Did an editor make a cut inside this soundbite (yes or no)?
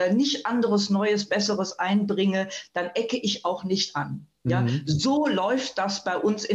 no